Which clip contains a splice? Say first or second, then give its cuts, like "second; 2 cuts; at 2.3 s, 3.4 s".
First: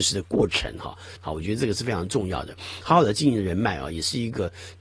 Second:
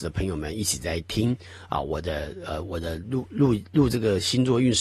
first; 1 cut; at 1.2 s